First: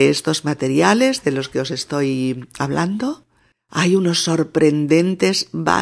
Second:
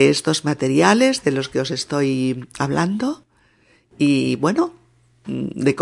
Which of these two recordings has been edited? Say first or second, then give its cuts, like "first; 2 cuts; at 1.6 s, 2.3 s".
first; 1 cut; at 3.5 s